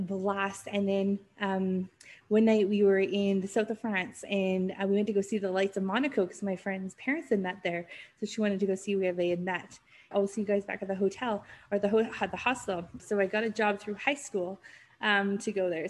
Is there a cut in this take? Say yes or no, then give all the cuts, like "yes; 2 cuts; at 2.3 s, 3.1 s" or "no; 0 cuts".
yes; 2 cuts; at 10.1 s, 13.0 s